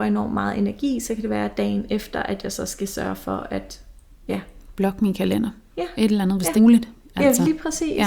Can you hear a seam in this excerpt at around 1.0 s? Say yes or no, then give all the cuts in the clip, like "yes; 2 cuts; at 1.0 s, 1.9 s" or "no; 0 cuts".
no; 1 cut; at 6.6 s